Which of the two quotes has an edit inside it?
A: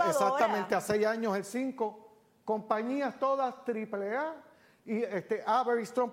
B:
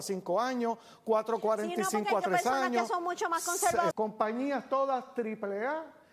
B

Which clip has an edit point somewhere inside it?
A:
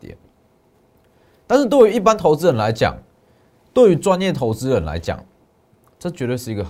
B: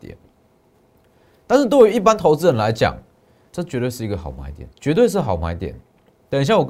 B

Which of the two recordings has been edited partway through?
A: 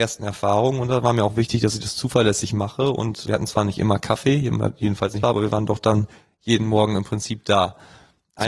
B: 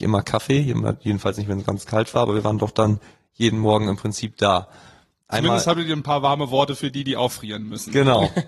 A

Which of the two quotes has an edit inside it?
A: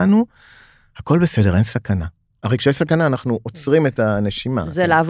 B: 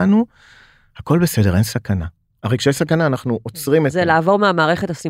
B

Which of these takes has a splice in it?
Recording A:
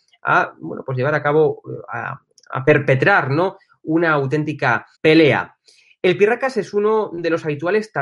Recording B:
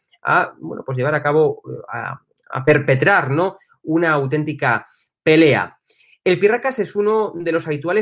A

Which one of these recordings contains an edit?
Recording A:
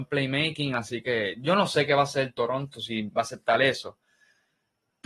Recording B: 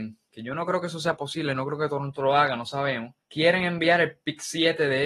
B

